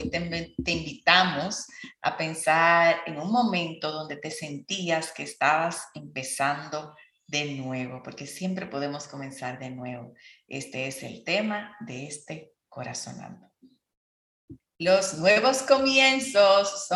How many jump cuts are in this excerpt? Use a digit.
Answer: 0